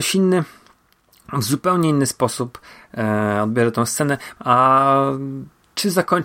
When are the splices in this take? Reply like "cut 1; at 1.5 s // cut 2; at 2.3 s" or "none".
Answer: cut 1; at 4.4 s